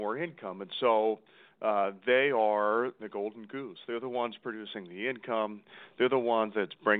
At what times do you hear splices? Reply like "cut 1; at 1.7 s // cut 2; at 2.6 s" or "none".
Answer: cut 1; at 3.0 s